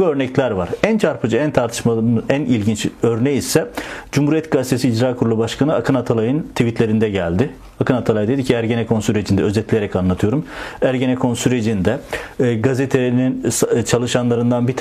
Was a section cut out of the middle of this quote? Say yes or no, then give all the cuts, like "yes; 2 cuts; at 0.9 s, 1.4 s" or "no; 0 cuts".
no; 0 cuts